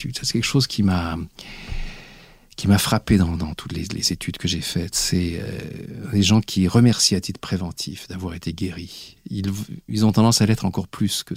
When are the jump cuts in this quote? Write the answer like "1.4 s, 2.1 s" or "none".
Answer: none